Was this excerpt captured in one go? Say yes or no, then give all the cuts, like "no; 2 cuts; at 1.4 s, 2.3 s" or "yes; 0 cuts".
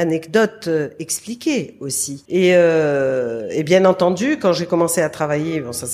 no; 1 cut; at 2.3 s